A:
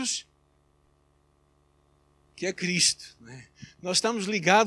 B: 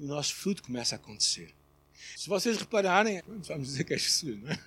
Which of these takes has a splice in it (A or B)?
B